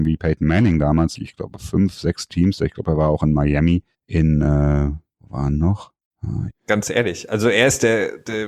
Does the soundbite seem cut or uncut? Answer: cut